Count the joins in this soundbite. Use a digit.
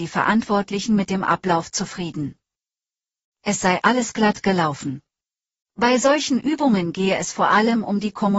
1